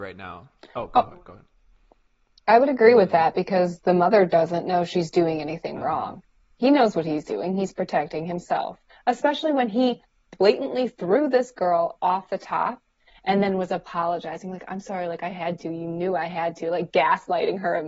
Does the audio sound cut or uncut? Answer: uncut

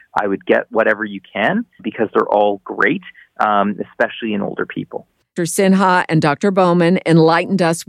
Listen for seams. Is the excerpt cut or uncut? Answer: cut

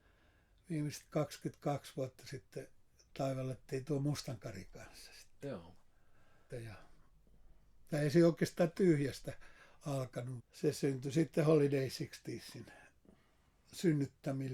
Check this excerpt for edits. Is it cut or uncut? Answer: cut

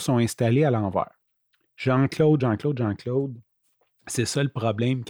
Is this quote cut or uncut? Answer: cut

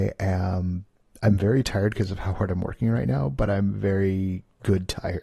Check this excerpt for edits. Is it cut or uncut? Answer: uncut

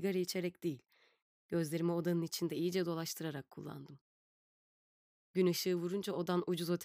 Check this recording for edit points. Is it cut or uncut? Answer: uncut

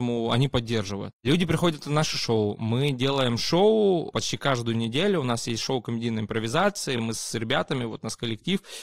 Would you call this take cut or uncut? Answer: uncut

